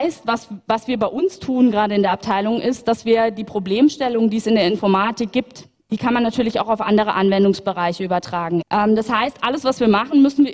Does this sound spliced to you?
yes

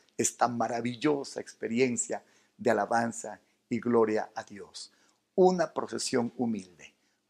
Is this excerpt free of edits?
yes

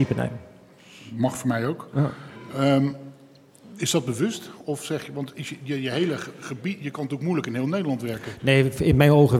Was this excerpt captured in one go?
yes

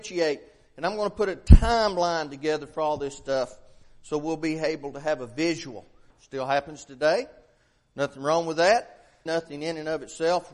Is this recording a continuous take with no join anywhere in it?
no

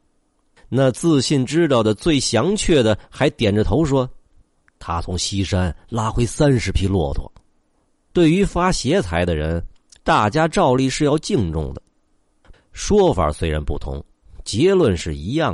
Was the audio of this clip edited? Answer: yes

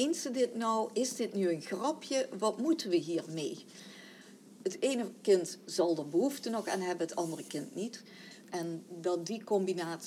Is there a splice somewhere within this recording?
yes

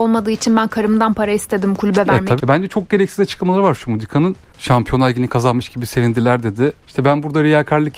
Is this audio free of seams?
no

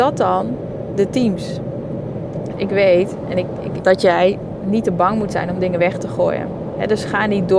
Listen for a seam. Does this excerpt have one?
yes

